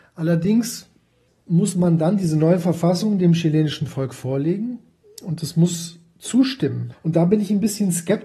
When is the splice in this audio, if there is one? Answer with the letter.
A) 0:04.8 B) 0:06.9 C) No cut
B